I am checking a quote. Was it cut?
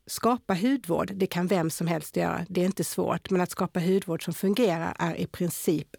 no; 0 cuts

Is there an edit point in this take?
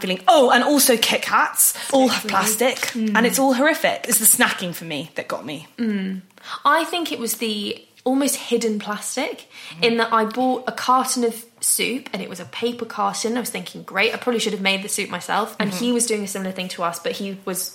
yes; 1 cut; at 15.6 s

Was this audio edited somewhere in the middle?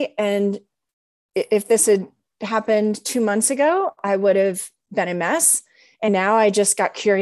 no; 0 cuts

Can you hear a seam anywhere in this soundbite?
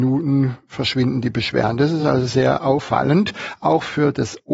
no; 0 cuts

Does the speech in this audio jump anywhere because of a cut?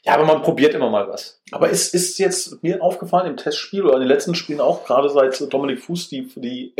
no; 0 cuts

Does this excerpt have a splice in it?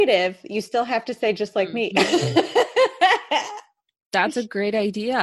no; 0 cuts

